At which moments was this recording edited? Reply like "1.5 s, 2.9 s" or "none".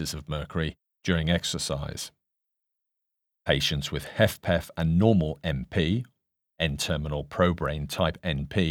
none